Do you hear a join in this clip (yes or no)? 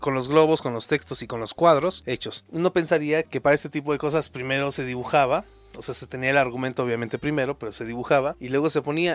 no